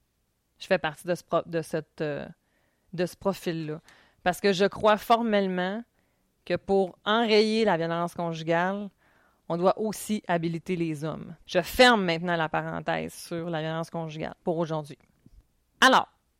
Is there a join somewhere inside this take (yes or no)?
yes